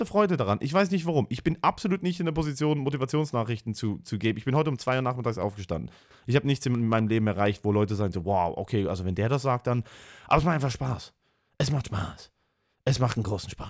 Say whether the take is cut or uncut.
uncut